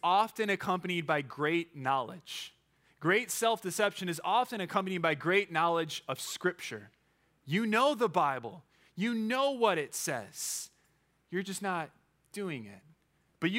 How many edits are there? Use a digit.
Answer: 0